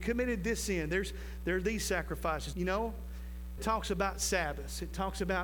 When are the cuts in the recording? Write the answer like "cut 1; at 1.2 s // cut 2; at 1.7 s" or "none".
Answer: cut 1; at 2.5 s // cut 2; at 3.6 s